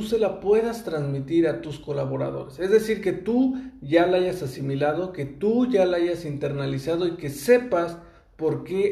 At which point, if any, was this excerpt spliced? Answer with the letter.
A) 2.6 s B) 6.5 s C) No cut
C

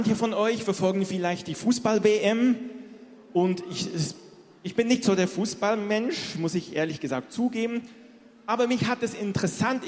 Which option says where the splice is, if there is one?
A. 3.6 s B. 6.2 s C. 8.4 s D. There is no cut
D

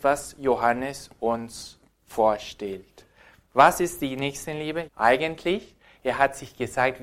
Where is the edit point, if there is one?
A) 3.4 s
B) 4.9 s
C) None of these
B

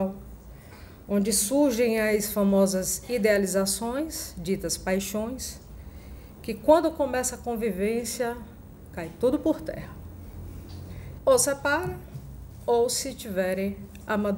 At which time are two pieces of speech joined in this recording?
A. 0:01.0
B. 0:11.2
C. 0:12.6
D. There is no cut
B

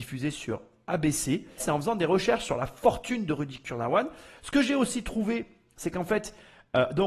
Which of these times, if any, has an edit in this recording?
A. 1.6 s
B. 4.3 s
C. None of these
A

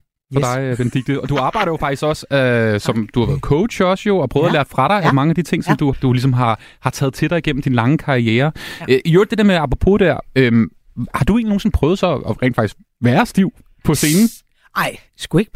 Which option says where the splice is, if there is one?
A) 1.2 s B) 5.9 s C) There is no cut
B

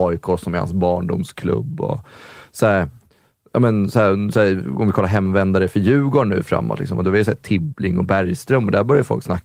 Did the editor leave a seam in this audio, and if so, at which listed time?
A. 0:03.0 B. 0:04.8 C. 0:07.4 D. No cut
D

